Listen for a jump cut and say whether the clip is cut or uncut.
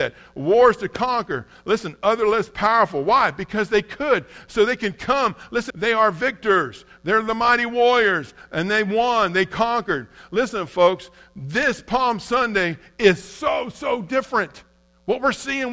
cut